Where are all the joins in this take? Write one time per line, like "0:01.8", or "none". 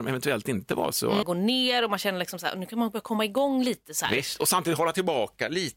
0:01.2